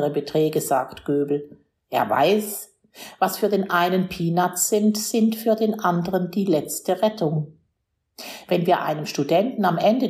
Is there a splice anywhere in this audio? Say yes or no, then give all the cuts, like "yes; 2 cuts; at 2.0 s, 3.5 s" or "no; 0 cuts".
no; 0 cuts